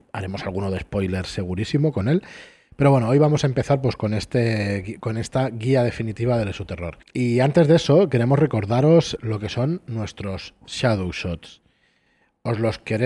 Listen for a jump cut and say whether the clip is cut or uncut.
cut